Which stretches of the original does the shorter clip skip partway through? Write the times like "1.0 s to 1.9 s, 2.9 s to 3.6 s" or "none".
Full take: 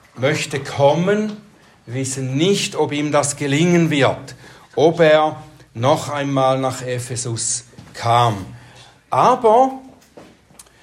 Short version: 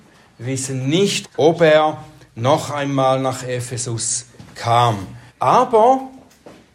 2.7 s to 4.6 s, 8.7 s to 9.0 s

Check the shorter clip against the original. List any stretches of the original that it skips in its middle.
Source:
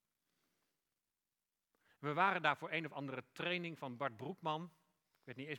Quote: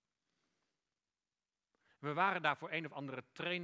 none

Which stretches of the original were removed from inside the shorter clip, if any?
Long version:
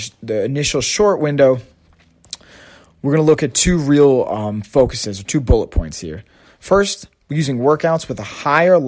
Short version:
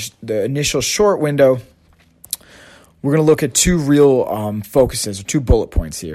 none

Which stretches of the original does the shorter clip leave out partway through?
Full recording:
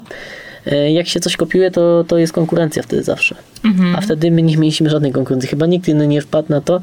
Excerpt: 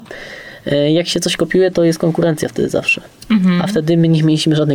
1.7 s to 2.1 s

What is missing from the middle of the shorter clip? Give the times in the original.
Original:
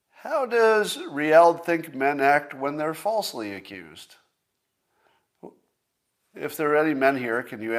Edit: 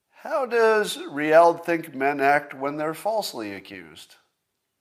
none

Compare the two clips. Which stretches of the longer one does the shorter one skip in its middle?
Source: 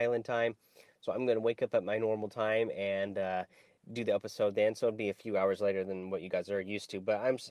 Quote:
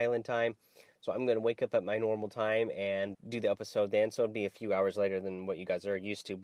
3.1 s to 3.8 s

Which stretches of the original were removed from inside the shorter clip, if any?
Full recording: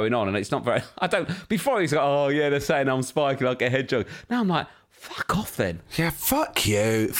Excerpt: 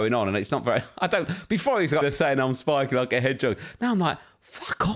2.0 s to 2.5 s

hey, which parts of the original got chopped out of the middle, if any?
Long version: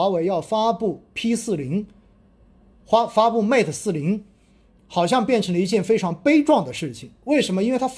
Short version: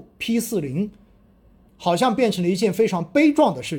2.6 s to 4.8 s

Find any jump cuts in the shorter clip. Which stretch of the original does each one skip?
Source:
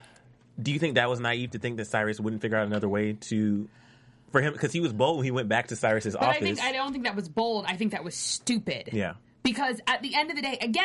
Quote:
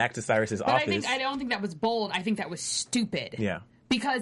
none

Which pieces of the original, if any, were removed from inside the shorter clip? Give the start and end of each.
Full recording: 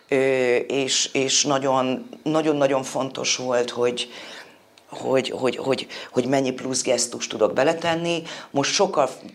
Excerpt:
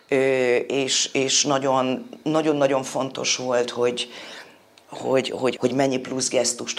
5.6 s to 6.1 s

